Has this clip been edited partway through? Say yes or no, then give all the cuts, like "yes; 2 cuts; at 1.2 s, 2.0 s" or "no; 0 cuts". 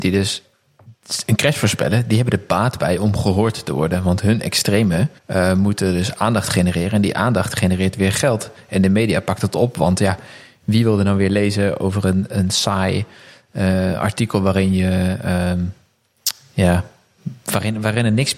yes; 1 cut; at 5.2 s